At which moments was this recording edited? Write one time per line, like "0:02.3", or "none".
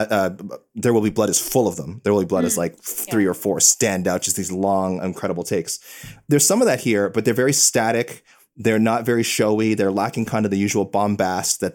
none